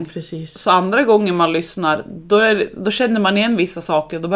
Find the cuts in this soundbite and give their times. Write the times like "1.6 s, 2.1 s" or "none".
none